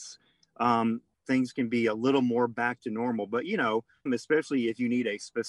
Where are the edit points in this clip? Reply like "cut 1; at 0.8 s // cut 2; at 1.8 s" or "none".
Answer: cut 1; at 4.1 s